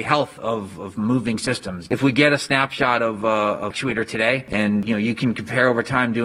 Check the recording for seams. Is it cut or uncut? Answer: cut